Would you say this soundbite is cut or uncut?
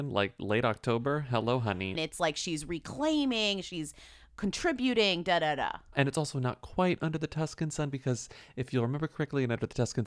cut